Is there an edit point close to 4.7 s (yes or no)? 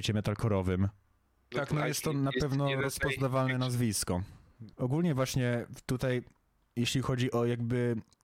yes